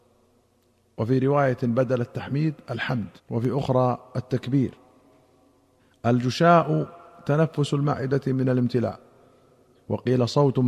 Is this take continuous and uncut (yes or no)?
no